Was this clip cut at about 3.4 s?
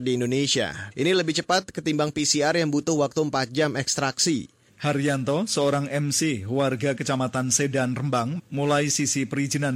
no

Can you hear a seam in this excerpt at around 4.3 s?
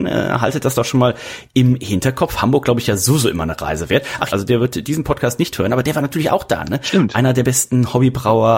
yes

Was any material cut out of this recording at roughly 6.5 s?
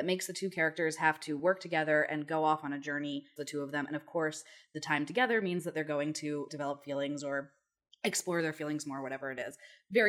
yes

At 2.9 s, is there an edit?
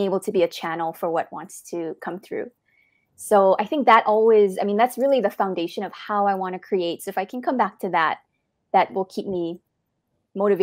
no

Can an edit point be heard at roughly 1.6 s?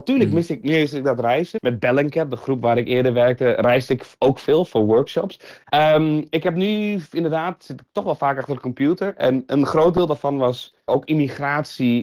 yes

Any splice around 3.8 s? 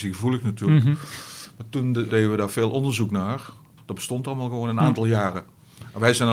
yes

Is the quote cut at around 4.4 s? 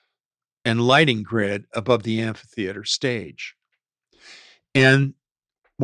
no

